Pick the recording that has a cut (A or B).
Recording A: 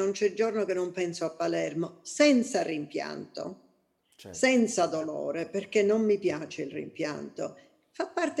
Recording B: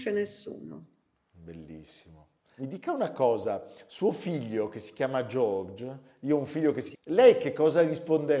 B